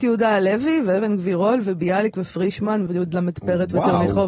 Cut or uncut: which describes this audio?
cut